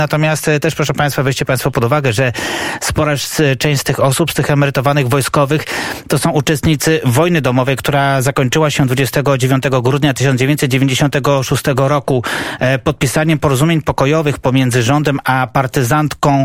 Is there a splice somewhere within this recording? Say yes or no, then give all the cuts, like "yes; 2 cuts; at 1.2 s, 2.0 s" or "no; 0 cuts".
no; 0 cuts